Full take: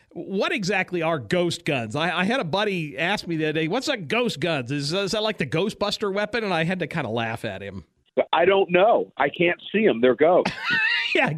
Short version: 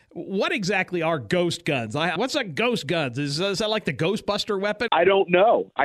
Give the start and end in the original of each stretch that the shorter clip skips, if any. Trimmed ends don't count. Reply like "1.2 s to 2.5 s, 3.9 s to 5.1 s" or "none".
2.2 s to 3.7 s, 6.4 s to 8.3 s